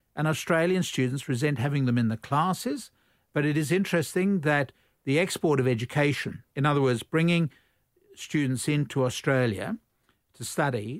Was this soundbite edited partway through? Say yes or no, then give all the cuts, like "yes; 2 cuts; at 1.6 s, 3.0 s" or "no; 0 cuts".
no; 0 cuts